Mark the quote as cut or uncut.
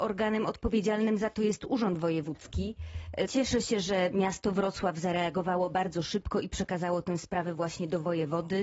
cut